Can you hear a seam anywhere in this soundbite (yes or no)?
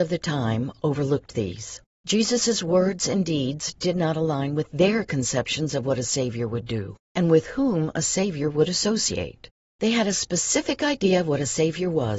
yes